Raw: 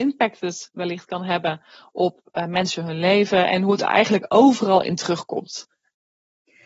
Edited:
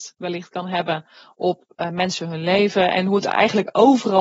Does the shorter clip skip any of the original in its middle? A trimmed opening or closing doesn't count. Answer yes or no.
no